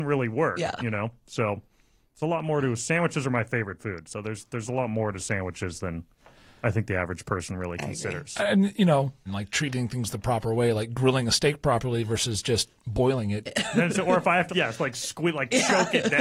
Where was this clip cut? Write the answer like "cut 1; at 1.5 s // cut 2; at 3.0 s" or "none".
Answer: cut 1; at 9.3 s // cut 2; at 13.5 s // cut 3; at 14.5 s

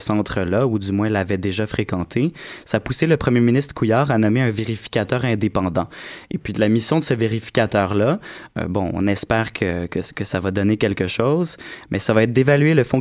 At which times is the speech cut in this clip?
none

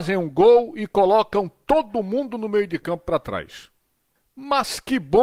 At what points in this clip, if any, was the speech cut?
cut 1; at 4.2 s

